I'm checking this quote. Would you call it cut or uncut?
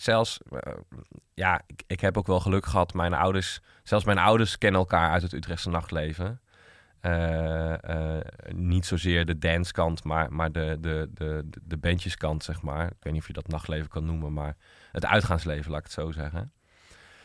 cut